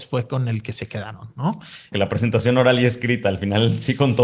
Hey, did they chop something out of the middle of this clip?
yes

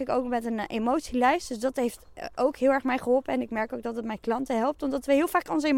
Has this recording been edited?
no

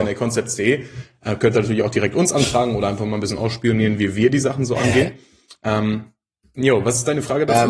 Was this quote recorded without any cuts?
yes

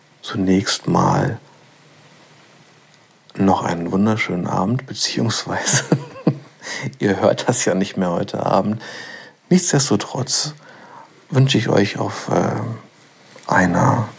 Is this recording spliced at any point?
no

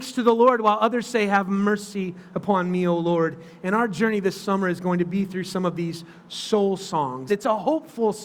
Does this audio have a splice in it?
yes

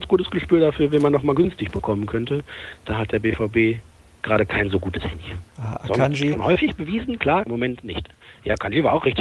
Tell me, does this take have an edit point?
yes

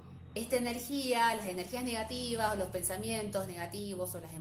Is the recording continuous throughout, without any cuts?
yes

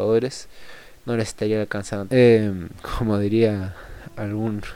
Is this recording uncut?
no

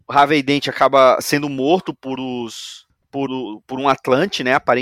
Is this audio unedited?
no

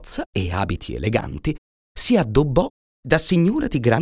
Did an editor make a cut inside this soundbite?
yes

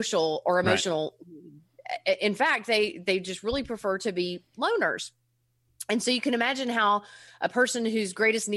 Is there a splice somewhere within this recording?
no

